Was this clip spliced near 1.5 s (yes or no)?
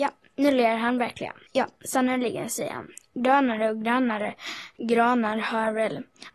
yes